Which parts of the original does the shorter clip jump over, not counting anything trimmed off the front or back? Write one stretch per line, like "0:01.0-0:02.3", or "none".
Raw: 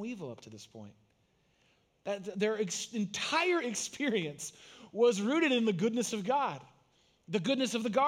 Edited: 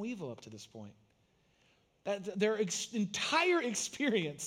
none